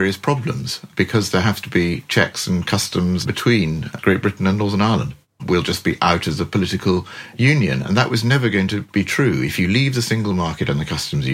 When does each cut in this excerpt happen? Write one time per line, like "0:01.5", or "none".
0:05.4